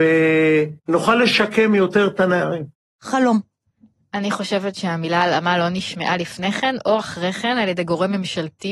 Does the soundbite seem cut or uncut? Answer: uncut